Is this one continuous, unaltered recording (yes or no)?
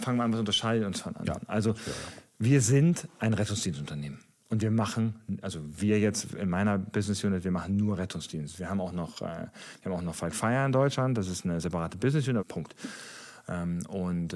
no